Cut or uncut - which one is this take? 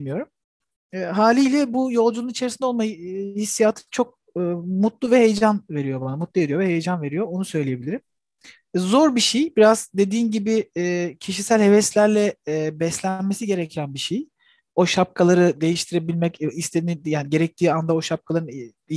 uncut